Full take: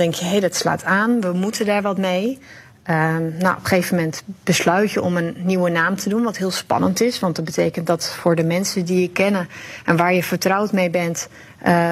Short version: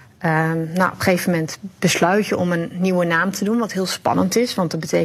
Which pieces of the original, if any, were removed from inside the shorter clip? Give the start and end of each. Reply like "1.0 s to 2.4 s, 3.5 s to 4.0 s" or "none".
none